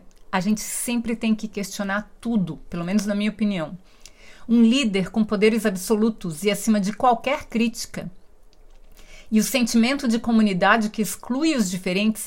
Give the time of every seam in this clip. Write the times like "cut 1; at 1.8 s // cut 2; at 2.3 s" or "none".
none